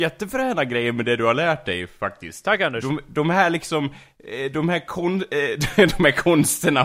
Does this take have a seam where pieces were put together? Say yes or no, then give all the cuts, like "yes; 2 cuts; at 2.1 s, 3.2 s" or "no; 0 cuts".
no; 0 cuts